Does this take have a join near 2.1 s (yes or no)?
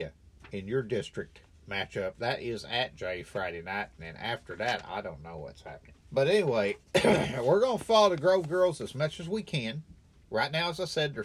no